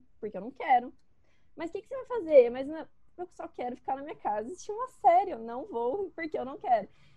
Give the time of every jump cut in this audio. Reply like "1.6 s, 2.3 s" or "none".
none